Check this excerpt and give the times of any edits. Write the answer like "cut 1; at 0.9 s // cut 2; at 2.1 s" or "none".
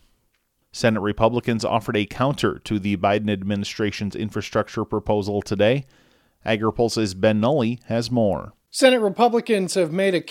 none